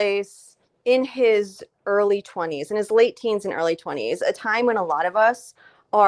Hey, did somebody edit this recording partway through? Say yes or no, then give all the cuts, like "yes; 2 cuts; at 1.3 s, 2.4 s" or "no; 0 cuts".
no; 0 cuts